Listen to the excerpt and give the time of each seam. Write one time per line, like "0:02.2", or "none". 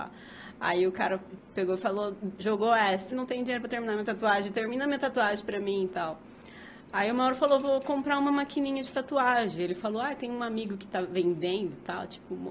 0:03.1